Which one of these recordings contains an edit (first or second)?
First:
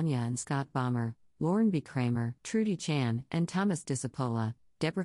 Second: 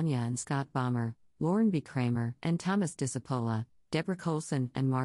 second